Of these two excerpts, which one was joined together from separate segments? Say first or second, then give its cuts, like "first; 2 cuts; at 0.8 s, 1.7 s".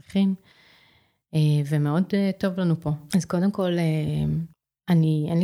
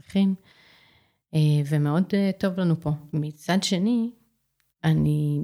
first; 1 cut; at 3.1 s